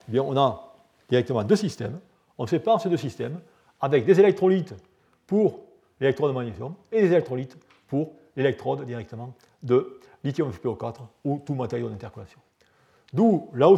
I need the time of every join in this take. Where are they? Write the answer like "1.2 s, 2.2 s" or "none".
none

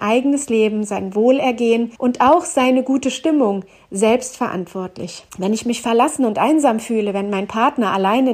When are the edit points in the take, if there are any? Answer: 2.0 s, 5.3 s

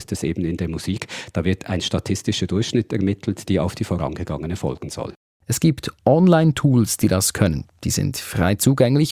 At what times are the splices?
3.5 s

